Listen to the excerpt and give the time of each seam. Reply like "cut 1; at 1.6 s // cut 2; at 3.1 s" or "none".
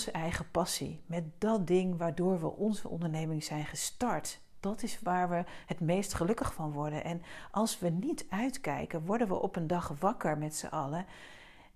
none